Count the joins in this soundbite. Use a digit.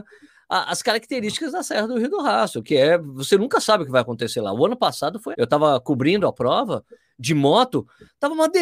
1